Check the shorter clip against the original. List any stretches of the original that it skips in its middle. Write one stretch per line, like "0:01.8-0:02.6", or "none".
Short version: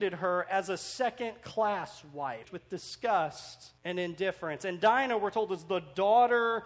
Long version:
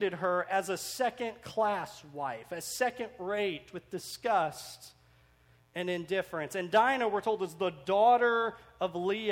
0:02.4-0:03.7
0:05.0-0:05.7